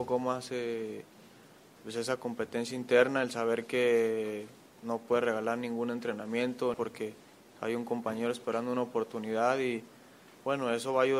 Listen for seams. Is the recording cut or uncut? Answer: cut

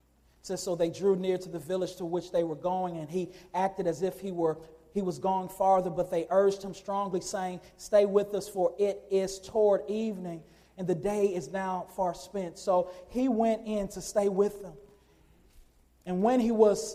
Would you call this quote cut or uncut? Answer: uncut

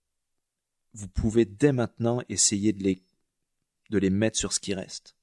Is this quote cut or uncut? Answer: uncut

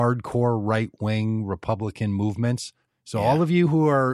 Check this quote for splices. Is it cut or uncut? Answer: cut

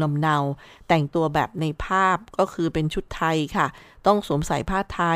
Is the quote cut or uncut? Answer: uncut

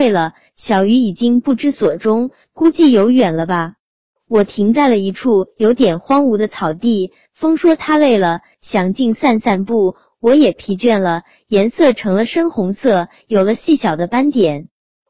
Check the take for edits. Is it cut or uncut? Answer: cut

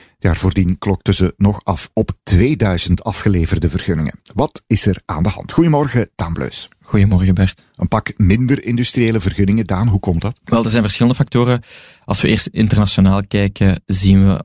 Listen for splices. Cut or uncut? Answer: uncut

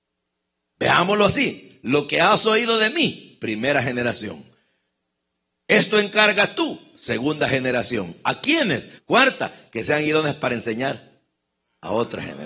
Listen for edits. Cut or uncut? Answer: cut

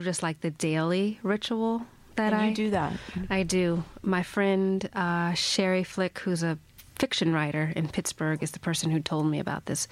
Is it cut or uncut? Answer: cut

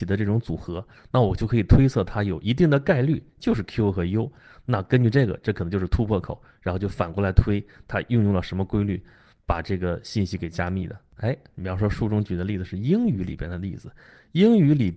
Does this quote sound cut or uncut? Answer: cut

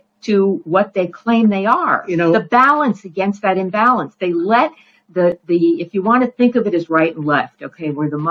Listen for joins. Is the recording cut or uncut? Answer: uncut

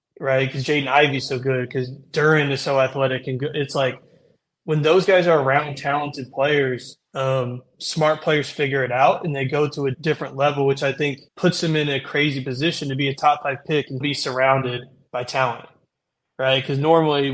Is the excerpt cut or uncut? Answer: cut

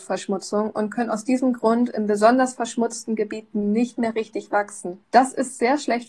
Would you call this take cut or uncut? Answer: cut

